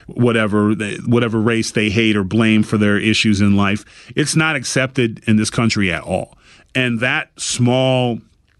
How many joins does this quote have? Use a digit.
0